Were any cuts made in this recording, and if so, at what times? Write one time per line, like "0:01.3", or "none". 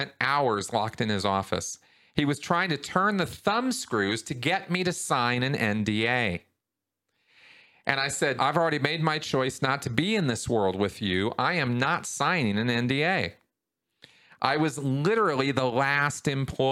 0:08.4